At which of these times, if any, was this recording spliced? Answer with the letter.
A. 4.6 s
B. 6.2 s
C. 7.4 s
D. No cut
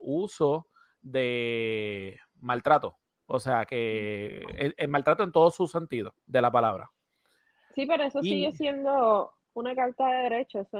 B